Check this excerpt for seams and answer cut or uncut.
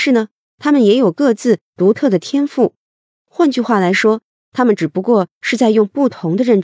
uncut